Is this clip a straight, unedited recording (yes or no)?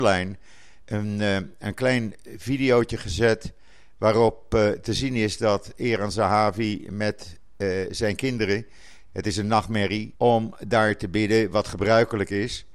no